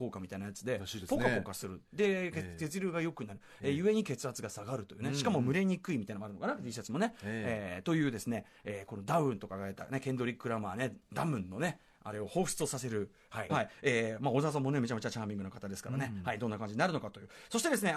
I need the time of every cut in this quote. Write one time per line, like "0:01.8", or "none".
0:13.5